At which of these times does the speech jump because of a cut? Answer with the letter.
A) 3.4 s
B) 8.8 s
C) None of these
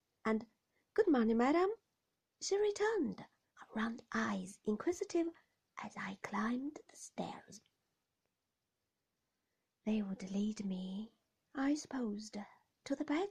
A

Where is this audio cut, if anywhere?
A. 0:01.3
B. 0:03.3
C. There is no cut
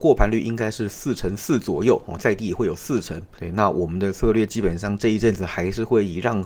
B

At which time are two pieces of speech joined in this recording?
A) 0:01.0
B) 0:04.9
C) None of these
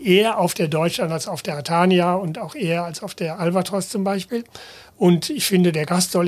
C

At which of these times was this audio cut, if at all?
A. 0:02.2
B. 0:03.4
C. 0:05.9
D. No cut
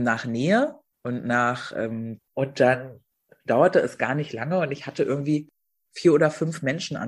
A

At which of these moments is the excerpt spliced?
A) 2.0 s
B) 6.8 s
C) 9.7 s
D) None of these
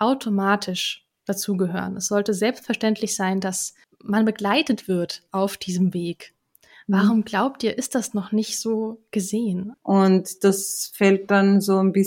C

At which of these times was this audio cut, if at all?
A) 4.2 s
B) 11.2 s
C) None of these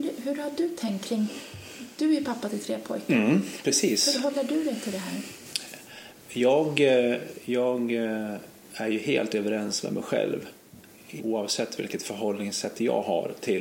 B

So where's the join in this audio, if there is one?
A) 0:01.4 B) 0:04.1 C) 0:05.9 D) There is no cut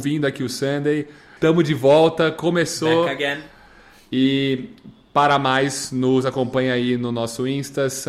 A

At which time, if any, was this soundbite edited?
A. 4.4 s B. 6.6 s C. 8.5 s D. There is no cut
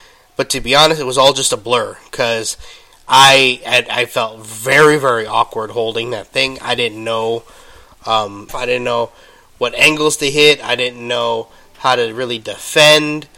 C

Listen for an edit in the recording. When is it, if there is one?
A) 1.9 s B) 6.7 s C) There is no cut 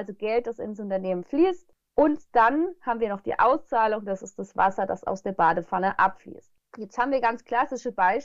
C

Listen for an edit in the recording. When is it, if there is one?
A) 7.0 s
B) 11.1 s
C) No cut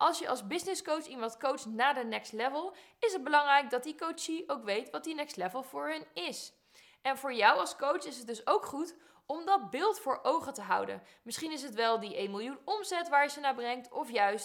C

